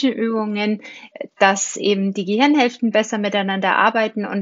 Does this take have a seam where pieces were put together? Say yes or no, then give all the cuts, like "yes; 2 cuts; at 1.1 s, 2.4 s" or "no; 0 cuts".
no; 0 cuts